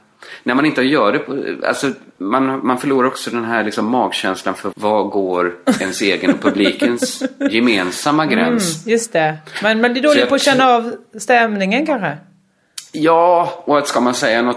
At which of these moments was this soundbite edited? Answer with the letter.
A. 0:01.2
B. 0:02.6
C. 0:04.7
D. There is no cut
C